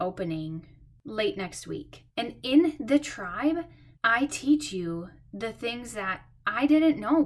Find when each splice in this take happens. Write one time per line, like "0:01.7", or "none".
0:02.1
0:04.0